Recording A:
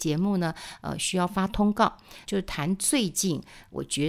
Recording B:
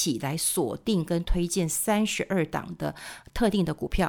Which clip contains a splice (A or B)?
A